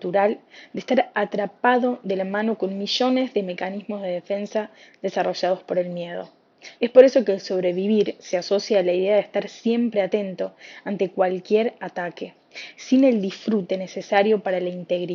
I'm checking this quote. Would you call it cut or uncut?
cut